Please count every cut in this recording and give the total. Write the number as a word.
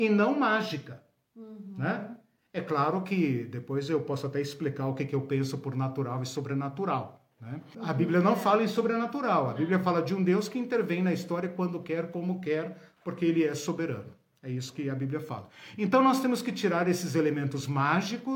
one